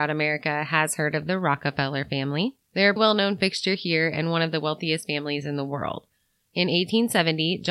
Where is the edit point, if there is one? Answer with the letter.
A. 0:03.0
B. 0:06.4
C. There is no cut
A